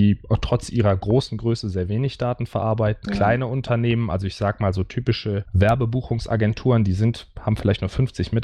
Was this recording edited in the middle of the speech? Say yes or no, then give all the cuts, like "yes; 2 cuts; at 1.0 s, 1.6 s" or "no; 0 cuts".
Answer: yes; 1 cut; at 3.0 s